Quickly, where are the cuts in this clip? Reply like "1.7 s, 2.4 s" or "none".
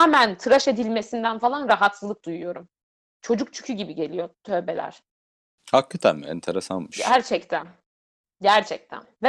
none